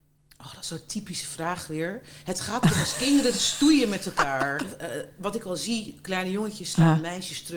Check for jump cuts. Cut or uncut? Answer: cut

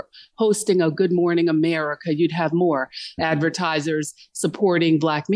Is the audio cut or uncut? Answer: cut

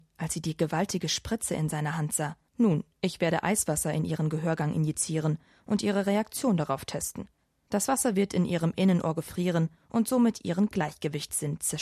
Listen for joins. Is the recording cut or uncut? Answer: cut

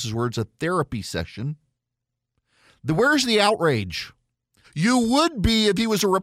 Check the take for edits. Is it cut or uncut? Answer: cut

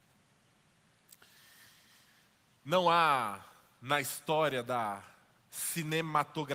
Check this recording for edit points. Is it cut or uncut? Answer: uncut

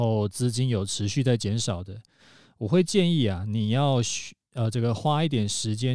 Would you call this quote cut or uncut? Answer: uncut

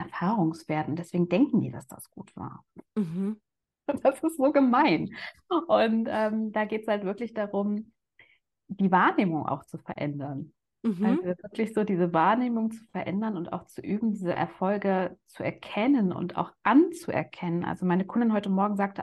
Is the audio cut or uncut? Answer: uncut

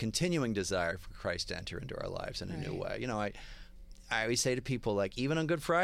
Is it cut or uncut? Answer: uncut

